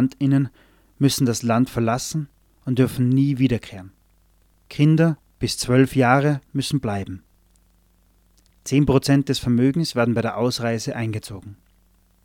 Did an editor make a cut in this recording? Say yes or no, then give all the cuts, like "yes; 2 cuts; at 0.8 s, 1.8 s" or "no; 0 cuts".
no; 0 cuts